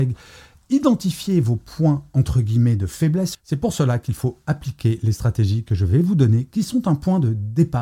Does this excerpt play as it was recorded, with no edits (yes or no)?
no